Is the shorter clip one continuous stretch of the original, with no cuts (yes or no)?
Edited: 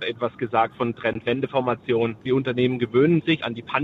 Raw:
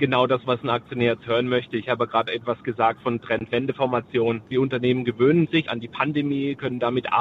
yes